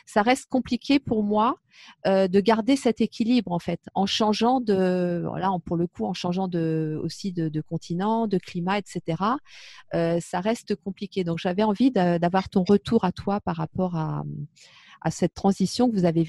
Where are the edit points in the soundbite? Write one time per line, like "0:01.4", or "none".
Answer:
none